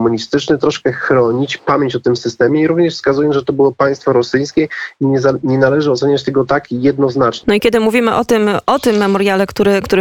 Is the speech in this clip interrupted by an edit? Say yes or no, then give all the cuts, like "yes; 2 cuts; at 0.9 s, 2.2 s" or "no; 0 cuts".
yes; 1 cut; at 7.4 s